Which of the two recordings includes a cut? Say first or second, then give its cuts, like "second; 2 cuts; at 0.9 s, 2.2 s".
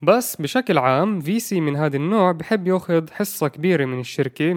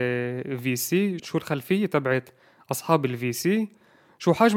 second; 1 cut; at 1.2 s